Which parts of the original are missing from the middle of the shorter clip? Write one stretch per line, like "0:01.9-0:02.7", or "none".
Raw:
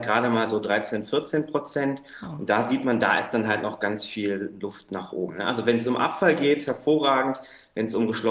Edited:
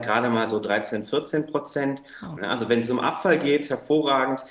0:02.4-0:05.3